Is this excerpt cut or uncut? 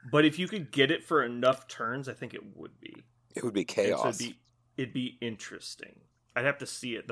uncut